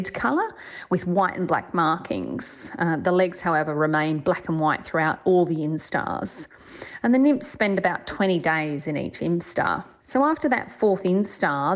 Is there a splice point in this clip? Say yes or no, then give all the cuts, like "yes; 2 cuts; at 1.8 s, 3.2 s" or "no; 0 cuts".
no; 0 cuts